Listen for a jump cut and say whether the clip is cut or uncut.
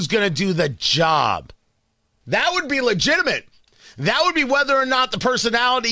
cut